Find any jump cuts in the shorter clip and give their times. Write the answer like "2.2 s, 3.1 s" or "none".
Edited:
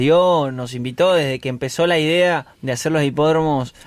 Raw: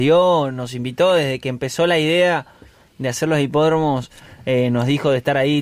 2.5 s